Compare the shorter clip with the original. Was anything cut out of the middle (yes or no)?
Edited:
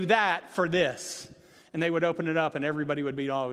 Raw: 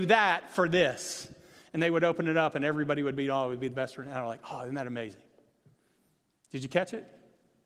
no